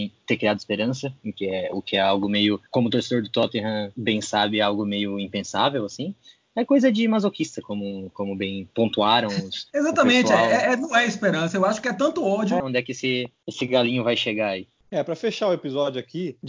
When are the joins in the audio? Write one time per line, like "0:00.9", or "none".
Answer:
0:02.7
0:12.6